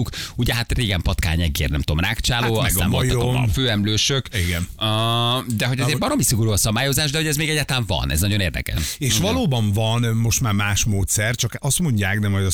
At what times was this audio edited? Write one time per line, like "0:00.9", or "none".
0:08.8